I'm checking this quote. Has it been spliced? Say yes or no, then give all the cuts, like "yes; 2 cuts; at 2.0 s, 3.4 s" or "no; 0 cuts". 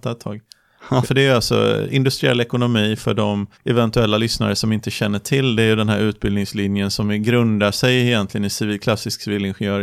yes; 2 cuts; at 1.0 s, 3.5 s